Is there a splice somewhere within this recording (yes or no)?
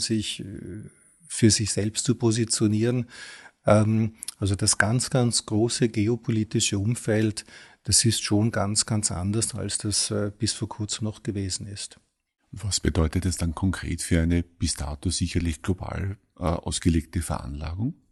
no